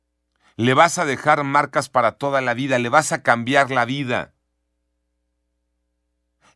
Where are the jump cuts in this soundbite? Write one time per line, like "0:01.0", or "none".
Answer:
none